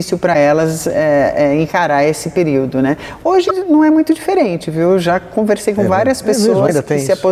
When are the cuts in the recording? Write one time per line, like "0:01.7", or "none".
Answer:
none